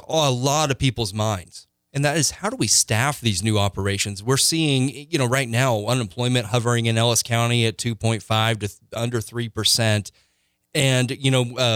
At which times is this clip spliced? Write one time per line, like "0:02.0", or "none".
none